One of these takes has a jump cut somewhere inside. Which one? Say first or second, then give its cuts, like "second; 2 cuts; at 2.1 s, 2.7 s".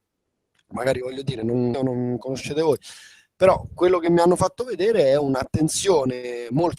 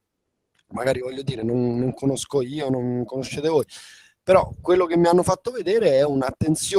first; 1 cut; at 1.7 s